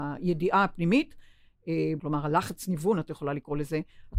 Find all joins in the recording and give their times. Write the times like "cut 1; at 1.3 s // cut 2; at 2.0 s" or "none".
cut 1; at 2.0 s